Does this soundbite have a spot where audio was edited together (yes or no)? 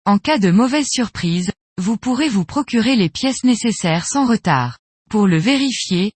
yes